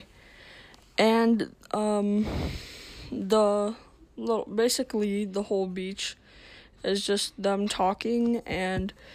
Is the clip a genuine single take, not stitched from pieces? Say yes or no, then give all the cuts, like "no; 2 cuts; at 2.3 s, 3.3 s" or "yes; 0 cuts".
yes; 0 cuts